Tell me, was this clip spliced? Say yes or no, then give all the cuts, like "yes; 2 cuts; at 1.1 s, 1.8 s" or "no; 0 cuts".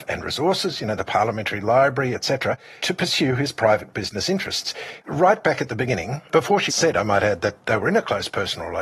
yes; 3 cuts; at 2.8 s, 5.0 s, 6.7 s